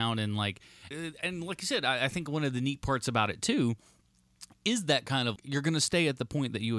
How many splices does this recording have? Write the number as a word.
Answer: two